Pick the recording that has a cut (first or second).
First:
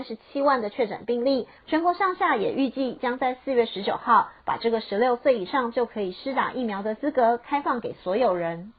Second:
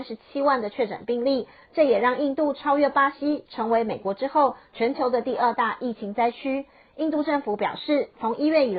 first